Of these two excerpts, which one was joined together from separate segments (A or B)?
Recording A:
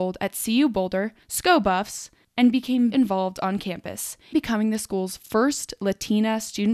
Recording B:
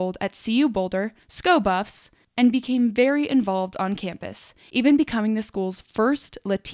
A